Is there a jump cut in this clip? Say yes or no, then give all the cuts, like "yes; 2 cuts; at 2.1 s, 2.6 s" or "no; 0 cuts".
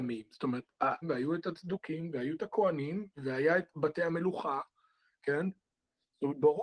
yes; 1 cut; at 1.0 s